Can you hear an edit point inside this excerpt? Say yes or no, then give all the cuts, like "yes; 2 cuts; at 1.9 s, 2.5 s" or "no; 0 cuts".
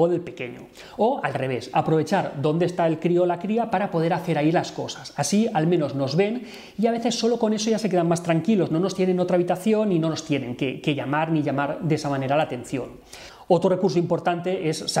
no; 0 cuts